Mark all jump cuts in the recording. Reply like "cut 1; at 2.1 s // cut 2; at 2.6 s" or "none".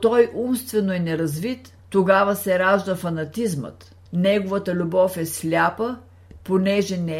cut 1; at 1.8 s // cut 2; at 4.1 s